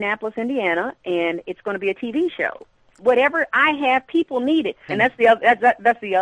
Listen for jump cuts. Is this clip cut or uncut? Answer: cut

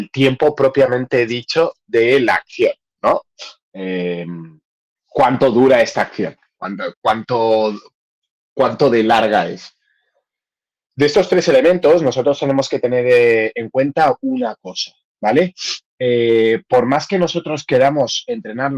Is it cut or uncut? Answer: cut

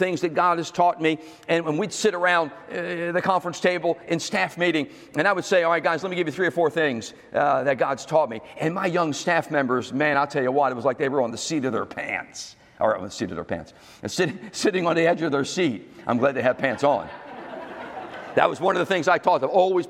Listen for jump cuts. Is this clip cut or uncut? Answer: uncut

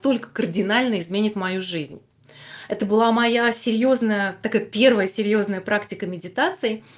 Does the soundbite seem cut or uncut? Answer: uncut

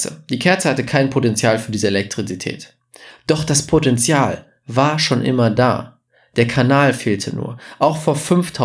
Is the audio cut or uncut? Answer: cut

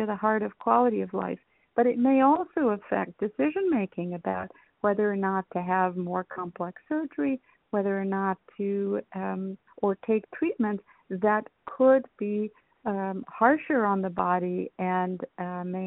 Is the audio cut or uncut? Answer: cut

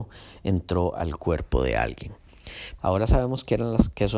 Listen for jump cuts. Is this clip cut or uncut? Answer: cut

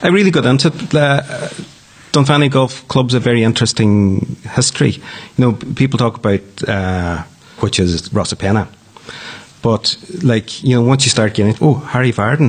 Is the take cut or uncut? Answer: cut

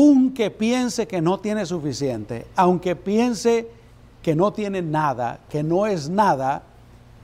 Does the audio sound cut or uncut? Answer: uncut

